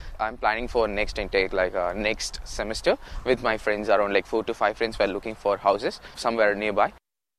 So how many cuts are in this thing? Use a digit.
1